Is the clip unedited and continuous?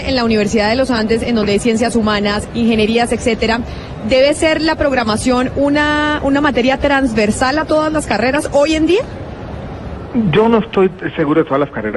no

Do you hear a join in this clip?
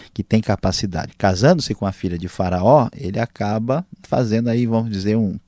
yes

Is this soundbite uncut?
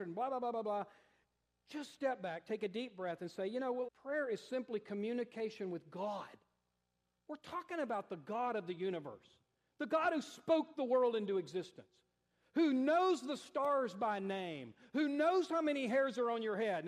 no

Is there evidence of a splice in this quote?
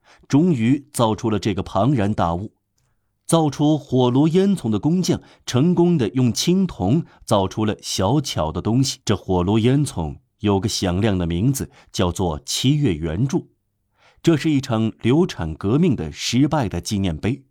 yes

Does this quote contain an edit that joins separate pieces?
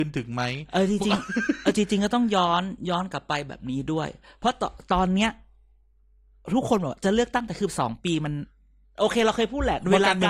no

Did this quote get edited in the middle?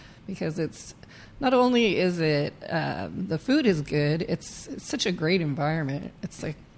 no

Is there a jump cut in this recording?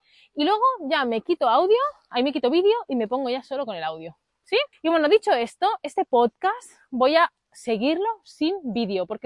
yes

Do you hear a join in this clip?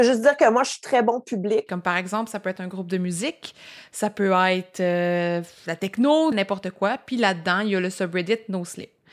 yes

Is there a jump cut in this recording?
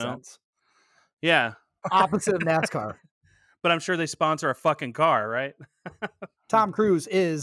yes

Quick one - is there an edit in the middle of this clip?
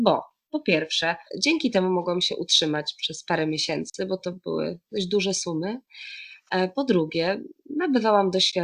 yes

